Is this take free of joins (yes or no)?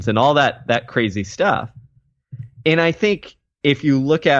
yes